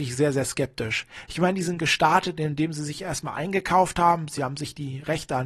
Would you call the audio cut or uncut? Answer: uncut